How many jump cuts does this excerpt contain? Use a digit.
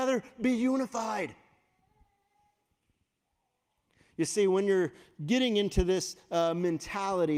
0